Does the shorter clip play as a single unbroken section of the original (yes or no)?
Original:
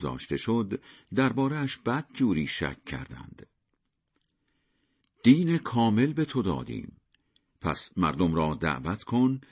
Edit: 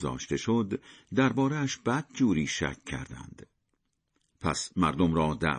no